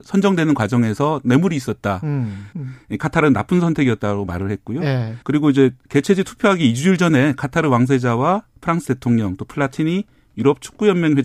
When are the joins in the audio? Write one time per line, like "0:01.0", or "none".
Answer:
0:02.5
0:05.2